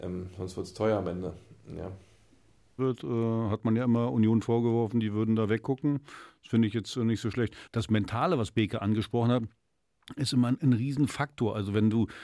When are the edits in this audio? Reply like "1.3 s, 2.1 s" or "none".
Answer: 2.8 s, 7.7 s